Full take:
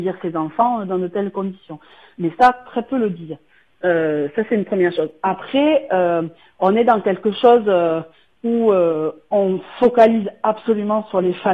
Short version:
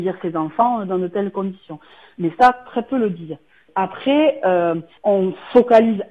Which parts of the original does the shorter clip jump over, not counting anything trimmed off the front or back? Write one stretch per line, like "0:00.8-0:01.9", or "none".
0:03.7-0:05.2
0:06.4-0:09.2